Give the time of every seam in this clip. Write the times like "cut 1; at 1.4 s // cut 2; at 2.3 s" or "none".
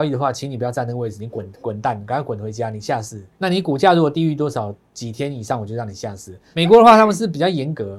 cut 1; at 3.3 s // cut 2; at 6.5 s